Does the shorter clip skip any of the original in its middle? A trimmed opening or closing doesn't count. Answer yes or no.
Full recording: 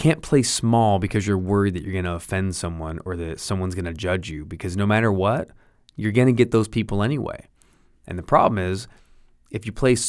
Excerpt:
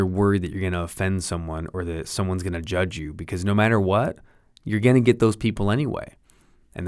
no